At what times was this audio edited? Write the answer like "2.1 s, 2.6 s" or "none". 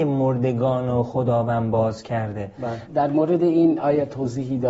2.9 s